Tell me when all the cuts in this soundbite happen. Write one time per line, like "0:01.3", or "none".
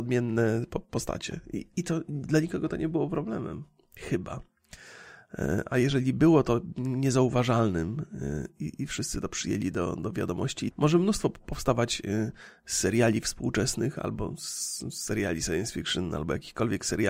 0:10.7